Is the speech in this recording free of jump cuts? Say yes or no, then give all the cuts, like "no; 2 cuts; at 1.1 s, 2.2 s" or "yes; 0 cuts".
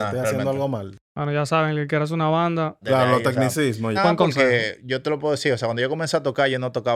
no; 3 cuts; at 1.1 s, 2.8 s, 4.0 s